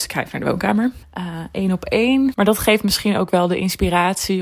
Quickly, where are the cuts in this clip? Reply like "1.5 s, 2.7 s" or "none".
1.0 s, 2.3 s

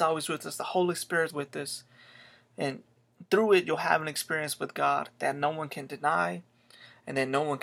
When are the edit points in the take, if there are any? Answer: 1.3 s

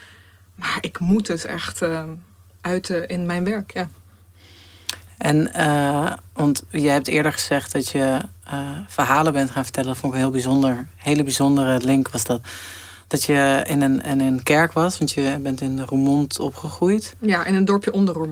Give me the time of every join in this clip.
none

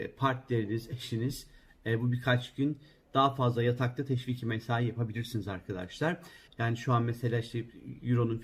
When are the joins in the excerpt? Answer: 6.5 s

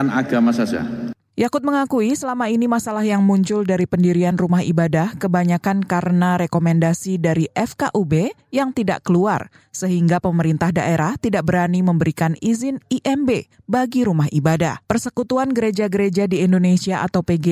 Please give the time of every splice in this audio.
14.8 s

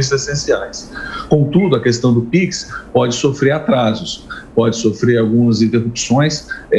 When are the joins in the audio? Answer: none

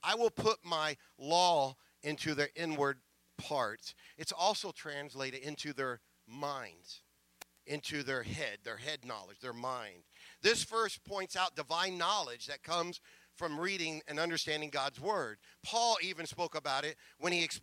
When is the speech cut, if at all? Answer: none

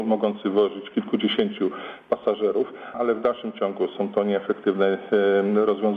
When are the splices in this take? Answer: 2.9 s

